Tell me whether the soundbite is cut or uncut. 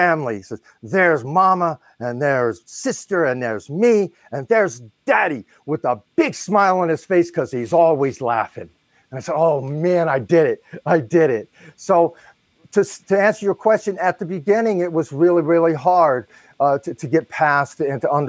uncut